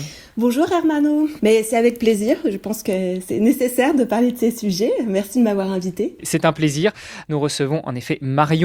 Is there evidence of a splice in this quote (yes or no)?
yes